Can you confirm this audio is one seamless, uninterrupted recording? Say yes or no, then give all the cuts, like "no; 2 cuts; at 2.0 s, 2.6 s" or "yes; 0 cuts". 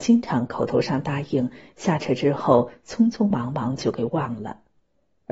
yes; 0 cuts